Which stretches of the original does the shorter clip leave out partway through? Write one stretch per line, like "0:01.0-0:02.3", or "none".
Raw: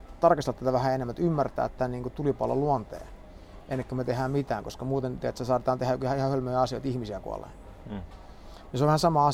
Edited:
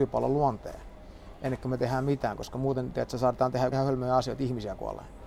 0:06.0-0:06.2